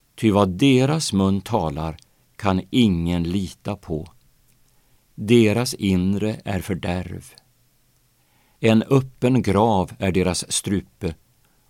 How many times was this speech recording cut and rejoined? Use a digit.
0